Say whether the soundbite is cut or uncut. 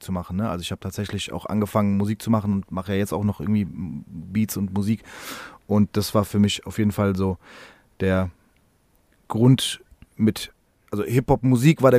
uncut